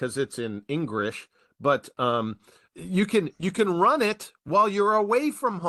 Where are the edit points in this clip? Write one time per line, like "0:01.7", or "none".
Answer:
0:02.7